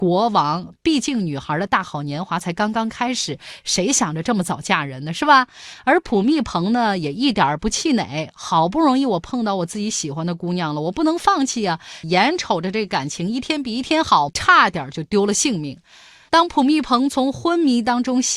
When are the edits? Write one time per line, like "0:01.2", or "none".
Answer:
0:12.0
0:14.3